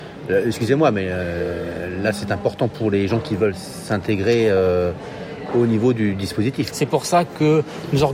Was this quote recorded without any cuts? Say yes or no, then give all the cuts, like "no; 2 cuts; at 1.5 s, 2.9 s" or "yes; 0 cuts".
no; 1 cut; at 6.7 s